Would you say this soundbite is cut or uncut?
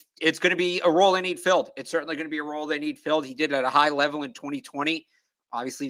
uncut